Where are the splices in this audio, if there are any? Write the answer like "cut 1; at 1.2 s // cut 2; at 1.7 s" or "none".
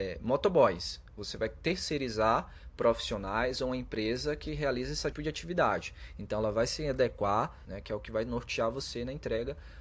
cut 1; at 5.1 s // cut 2; at 7.7 s

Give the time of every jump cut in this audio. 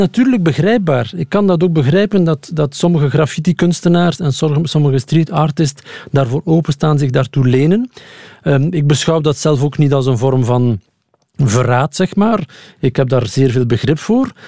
none

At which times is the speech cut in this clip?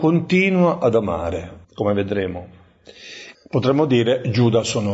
cut 1; at 1.6 s // cut 2; at 3.3 s

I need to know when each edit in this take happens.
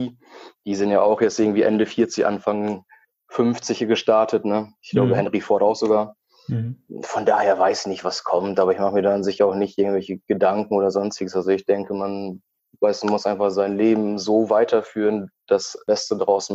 none

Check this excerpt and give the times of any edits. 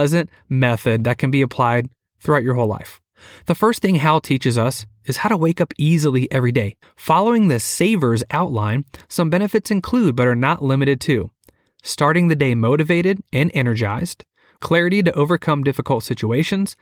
cut 1; at 6.8 s // cut 2; at 14.6 s

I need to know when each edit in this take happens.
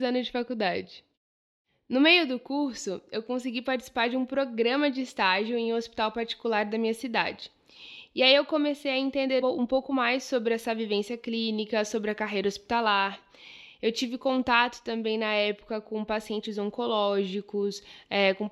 cut 1; at 9.4 s

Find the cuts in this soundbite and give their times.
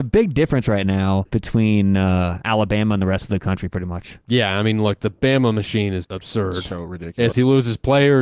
cut 1; at 1.3 s // cut 2; at 6.0 s // cut 3; at 7.3 s

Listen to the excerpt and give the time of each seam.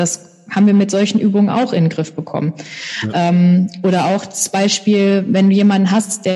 none

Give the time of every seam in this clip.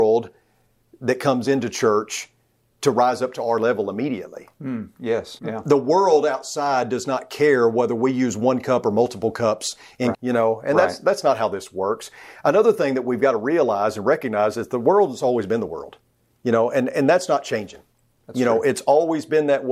cut 1; at 5.4 s // cut 2; at 10.1 s

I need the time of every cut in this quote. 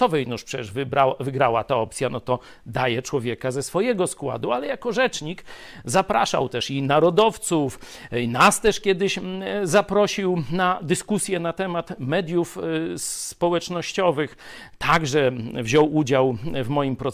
none

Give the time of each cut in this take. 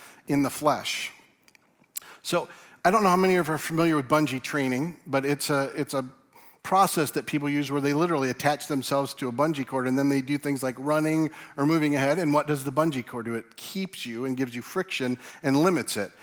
none

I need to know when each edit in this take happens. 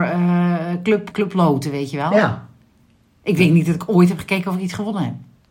cut 1; at 1.1 s

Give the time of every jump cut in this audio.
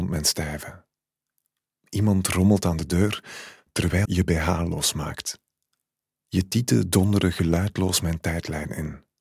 cut 1; at 4.0 s

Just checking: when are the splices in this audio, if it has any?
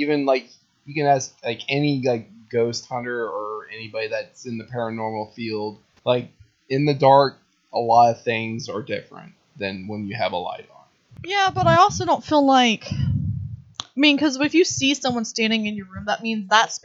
none

